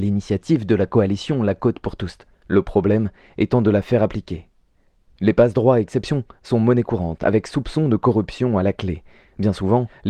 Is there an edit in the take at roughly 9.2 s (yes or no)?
no